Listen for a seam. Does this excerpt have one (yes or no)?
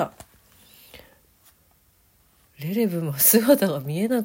no